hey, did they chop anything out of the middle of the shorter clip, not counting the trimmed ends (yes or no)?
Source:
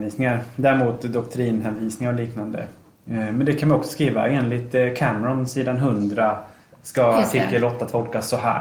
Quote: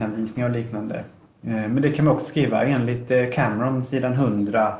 no